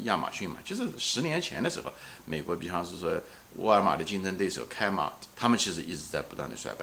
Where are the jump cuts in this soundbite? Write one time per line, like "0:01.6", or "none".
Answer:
0:05.3